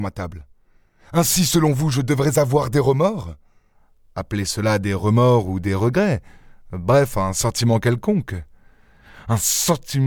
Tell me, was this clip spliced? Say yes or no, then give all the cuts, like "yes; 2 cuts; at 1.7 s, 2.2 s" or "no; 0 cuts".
no; 0 cuts